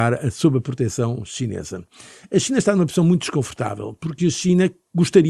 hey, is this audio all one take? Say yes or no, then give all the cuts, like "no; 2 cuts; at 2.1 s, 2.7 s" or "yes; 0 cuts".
yes; 0 cuts